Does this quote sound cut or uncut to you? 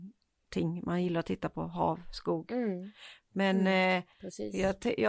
uncut